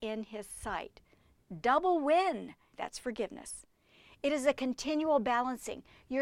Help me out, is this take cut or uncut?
cut